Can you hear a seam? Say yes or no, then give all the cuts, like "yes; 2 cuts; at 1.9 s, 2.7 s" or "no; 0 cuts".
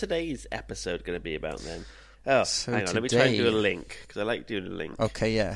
no; 0 cuts